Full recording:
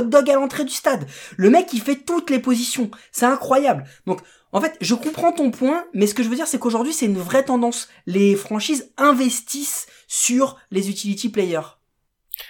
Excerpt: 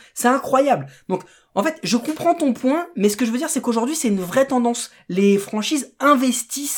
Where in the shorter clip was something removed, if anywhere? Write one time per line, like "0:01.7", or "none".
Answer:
none